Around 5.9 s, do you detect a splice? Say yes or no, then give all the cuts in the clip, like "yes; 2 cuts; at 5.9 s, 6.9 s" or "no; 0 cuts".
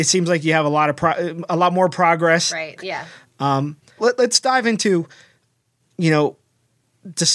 no; 2 cuts; at 2.8 s, 4.0 s